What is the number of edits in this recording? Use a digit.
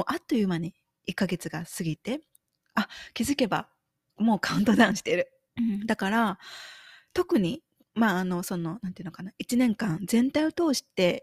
1